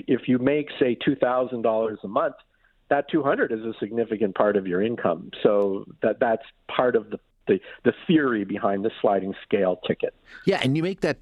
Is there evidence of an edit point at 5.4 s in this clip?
no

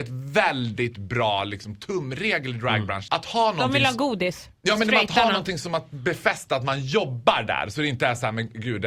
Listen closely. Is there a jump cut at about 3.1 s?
yes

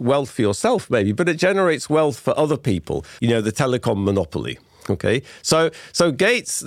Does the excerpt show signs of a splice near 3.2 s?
yes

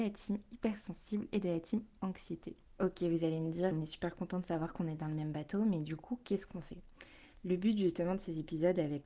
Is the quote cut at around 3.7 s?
yes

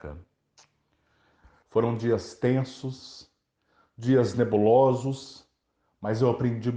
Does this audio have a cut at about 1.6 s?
yes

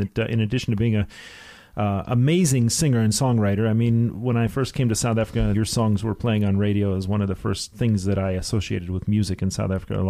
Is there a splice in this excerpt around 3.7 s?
no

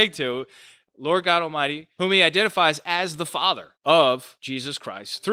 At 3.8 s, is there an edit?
yes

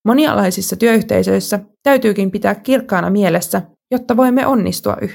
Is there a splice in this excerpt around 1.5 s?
no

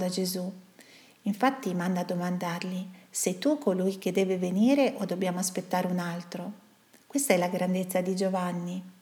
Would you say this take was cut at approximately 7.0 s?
yes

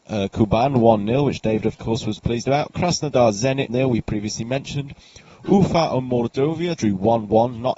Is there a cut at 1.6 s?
no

